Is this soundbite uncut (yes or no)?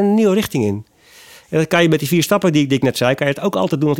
yes